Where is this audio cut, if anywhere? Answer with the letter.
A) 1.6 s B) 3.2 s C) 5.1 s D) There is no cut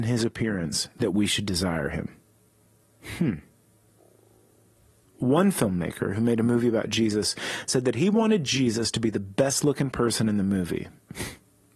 C